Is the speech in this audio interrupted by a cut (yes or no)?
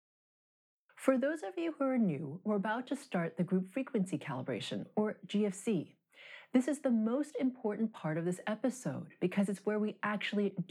no